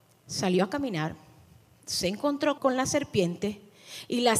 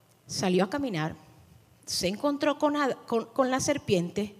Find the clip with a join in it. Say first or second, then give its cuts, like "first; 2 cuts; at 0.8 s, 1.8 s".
first; 1 cut; at 2.6 s